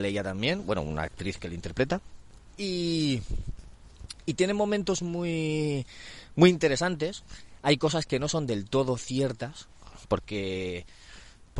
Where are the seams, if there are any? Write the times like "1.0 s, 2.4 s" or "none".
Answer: none